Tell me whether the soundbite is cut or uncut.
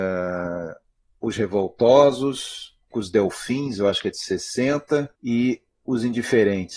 cut